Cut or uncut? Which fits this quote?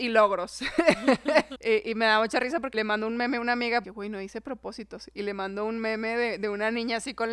cut